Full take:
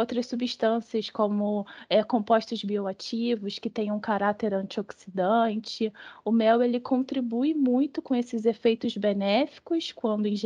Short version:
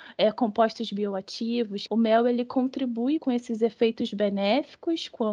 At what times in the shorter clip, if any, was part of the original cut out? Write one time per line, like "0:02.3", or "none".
0:01.9
0:03.2